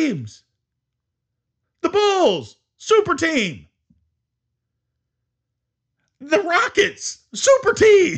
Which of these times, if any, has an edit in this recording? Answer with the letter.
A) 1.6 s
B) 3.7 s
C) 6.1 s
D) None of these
A